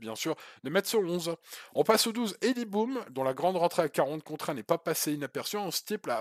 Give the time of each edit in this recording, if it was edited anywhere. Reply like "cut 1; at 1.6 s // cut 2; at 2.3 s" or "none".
none